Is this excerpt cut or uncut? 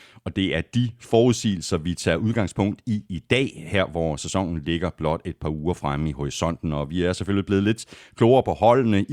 uncut